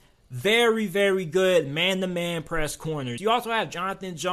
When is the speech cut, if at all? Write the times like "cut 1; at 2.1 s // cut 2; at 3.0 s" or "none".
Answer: cut 1; at 3.2 s